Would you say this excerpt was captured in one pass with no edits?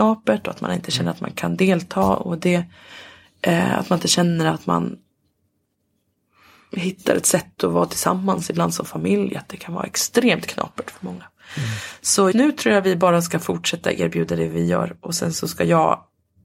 no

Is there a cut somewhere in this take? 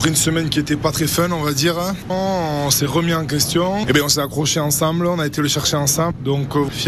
yes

